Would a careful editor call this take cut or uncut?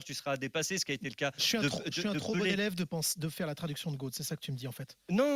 uncut